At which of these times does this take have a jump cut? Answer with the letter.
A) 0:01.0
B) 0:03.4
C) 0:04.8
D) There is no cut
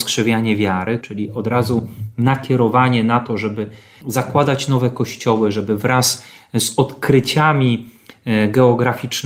A